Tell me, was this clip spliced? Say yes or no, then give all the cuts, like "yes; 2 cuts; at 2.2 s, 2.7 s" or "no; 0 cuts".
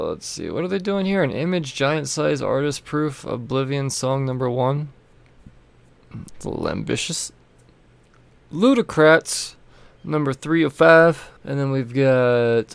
yes; 2 cuts; at 6.3 s, 11.4 s